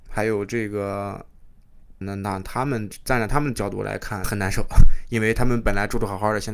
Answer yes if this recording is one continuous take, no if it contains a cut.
no